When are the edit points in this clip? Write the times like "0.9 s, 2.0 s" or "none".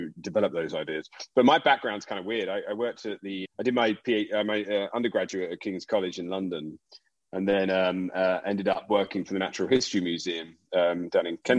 3.4 s